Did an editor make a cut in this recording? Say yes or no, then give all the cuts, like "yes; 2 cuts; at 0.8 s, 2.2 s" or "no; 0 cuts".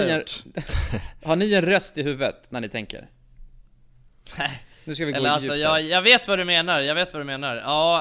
no; 0 cuts